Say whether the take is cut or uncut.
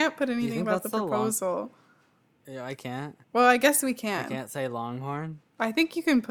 cut